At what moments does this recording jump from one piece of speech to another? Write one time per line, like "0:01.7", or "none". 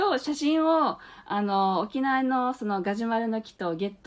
none